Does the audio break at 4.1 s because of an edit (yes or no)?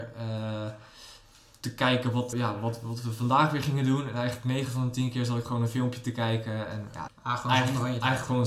no